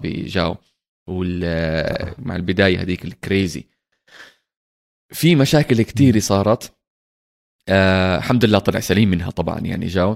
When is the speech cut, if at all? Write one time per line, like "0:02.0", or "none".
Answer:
none